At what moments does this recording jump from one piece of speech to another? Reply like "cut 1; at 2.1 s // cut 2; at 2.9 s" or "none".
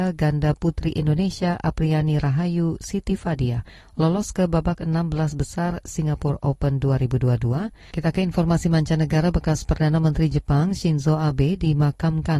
cut 1; at 7.9 s